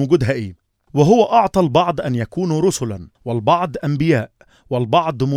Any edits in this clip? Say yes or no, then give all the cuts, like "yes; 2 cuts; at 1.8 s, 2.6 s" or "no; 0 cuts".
no; 0 cuts